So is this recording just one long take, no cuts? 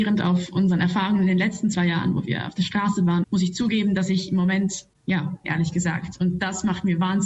no; 2 cuts; at 3.2 s, 5.4 s

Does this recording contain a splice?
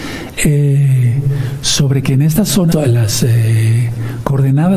yes; 1 cut; at 2.7 s

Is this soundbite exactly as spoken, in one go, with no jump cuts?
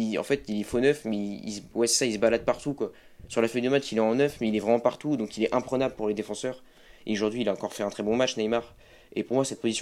yes; 0 cuts

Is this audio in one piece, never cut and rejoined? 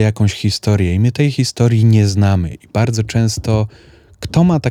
yes; 0 cuts

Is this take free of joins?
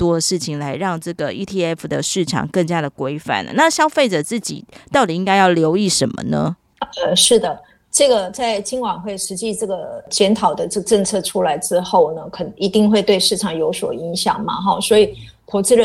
yes; 0 cuts

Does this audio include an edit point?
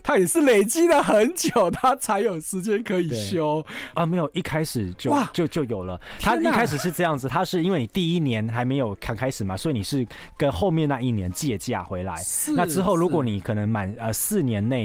yes; 1 cut; at 3.9 s

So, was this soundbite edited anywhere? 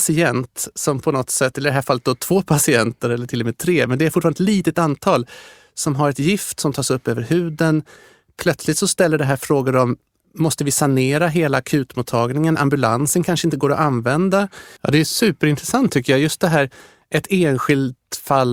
yes; 1 cut; at 14.8 s

